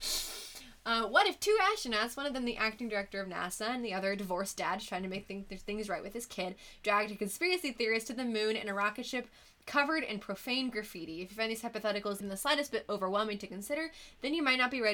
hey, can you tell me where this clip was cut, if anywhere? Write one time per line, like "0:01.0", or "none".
0:12.2